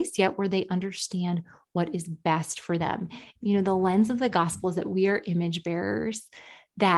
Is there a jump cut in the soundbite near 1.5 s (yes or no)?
no